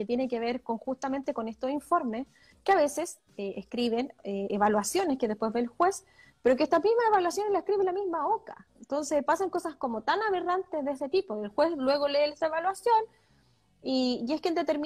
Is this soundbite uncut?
yes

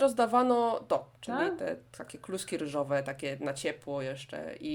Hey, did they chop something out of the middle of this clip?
yes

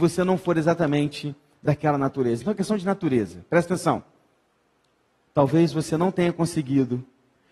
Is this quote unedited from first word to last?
yes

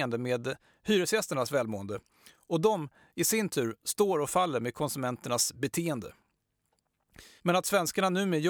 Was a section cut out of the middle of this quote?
yes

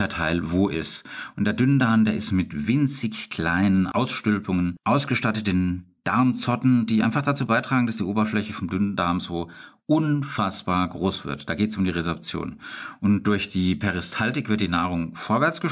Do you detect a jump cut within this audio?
no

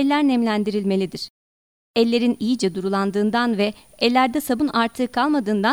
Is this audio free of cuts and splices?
no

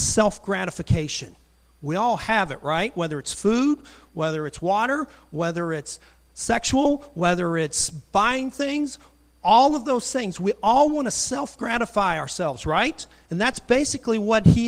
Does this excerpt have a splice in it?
no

